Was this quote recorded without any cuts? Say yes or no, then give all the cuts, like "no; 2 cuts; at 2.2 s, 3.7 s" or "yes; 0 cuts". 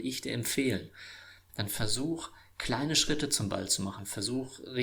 no; 1 cut; at 1.5 s